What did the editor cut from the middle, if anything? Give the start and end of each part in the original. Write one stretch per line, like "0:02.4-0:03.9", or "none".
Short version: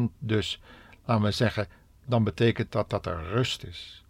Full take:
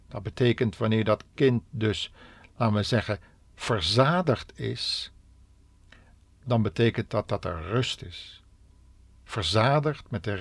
0:03.5-0:06.4

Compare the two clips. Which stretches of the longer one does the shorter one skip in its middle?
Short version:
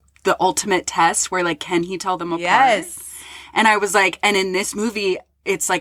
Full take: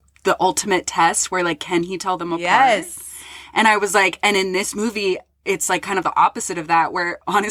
none

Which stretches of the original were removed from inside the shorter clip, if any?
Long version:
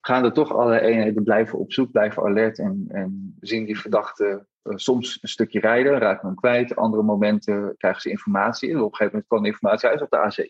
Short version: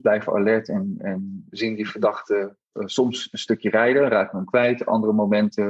none

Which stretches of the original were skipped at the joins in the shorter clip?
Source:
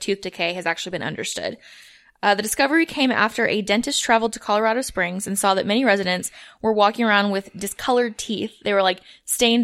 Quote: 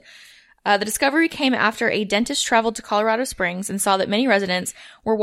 none

